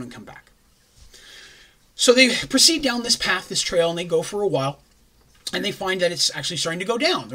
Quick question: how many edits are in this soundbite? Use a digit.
0